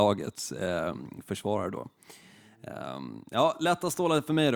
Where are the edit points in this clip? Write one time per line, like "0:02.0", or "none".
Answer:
none